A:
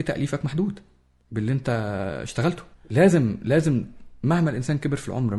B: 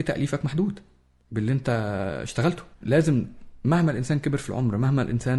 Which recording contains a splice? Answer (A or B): B